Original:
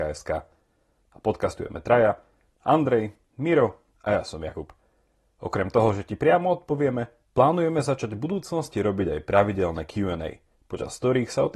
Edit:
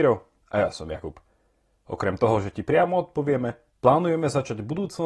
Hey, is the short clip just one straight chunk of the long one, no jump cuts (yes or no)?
yes